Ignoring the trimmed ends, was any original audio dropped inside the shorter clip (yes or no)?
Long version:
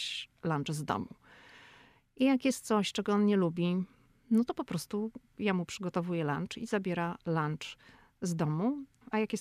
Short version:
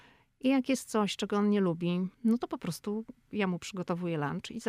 yes